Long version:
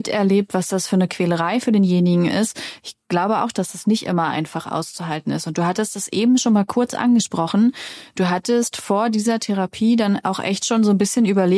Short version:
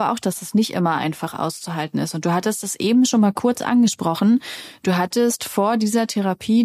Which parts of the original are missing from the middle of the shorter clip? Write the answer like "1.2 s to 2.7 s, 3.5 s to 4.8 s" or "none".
none

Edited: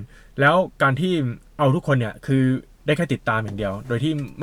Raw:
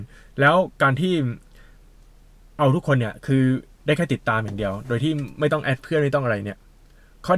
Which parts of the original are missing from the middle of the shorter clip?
1.5 s to 2.5 s

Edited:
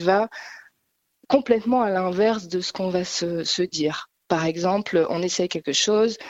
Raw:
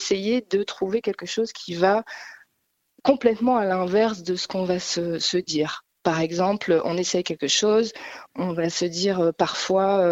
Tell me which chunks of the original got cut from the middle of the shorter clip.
none

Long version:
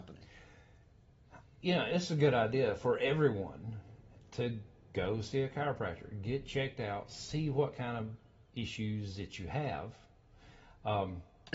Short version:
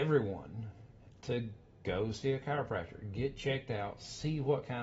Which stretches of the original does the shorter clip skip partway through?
none

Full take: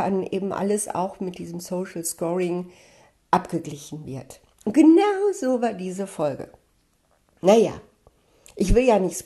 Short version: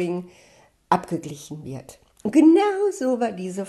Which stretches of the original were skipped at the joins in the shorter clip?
none

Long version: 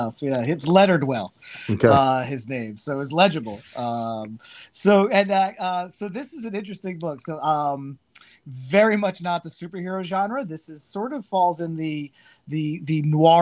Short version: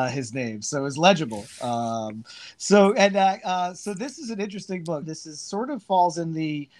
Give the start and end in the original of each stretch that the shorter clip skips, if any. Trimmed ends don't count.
7.2 s to 10.4 s

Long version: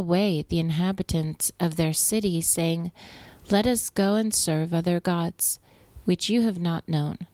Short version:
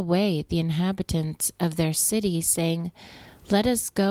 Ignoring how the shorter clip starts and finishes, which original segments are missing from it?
none

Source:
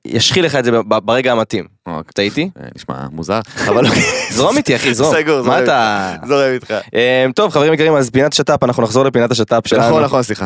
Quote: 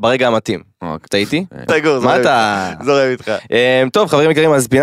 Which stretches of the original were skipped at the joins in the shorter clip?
2.7 s to 5.1 s

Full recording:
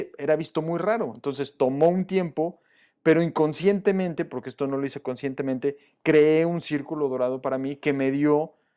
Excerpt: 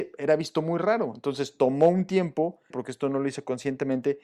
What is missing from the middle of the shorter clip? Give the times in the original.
2.7 s to 4.3 s

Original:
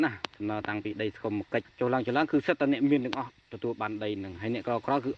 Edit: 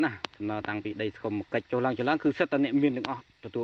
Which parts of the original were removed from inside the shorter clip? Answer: 1.6 s to 1.7 s

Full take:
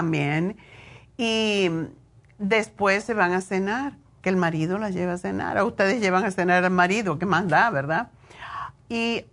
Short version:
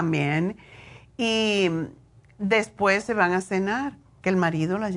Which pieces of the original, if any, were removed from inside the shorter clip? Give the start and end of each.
none

